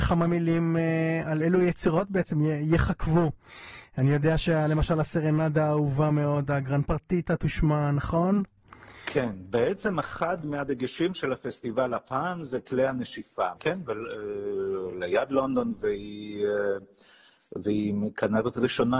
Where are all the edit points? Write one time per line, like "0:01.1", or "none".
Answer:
0:01.4
0:13.6